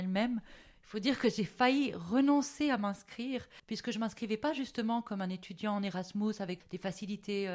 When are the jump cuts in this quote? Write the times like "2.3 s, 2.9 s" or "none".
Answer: 3.6 s, 6.6 s